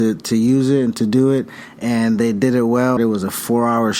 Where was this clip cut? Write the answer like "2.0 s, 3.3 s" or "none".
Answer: 3.0 s